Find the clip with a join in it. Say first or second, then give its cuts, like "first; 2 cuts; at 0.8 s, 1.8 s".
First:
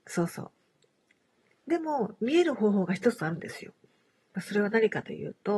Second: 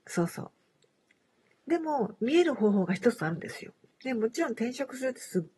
second; 1 cut; at 3.9 s